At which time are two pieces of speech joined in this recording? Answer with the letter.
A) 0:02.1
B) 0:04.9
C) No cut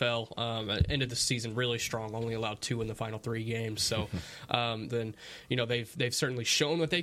B